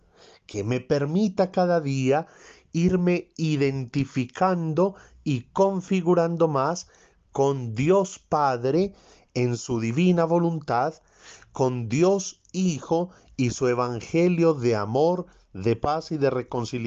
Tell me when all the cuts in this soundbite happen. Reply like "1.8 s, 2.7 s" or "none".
none